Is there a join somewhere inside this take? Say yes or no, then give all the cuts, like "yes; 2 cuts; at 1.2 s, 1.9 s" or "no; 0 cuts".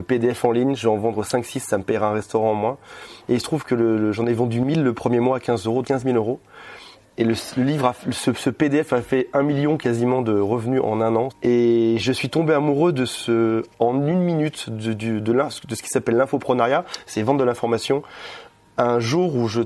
yes; 3 cuts; at 5.8 s, 11.3 s, 13.7 s